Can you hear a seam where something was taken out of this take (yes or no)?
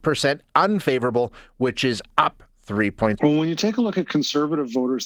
yes